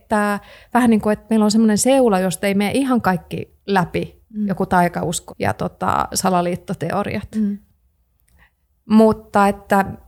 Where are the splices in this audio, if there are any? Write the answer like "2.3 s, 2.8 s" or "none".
5.3 s